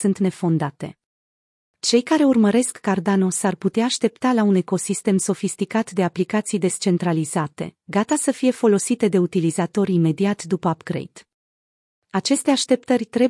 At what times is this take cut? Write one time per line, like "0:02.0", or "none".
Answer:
none